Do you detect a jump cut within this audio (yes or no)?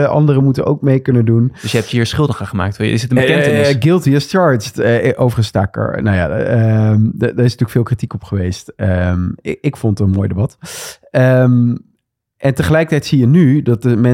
no